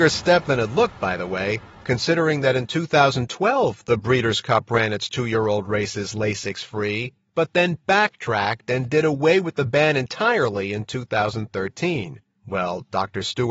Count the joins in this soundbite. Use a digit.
1